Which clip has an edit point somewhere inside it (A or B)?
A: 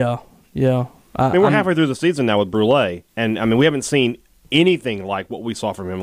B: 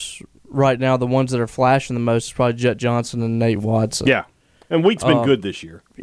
A